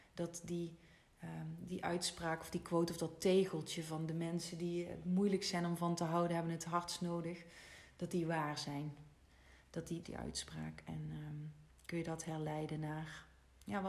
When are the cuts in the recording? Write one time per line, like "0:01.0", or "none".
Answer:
0:10.0